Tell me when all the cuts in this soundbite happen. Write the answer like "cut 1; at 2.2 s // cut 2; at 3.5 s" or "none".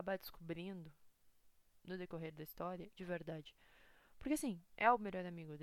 cut 1; at 3.0 s